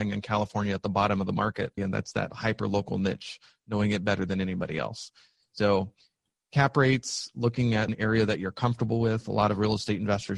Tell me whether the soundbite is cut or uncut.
cut